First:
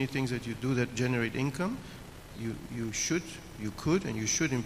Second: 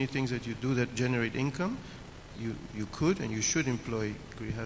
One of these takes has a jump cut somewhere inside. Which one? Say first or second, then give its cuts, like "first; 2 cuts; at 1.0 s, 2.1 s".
second; 1 cut; at 2.7 s